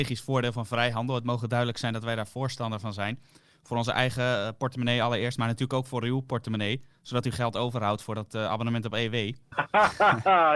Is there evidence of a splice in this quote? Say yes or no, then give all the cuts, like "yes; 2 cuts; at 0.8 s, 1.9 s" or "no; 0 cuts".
no; 0 cuts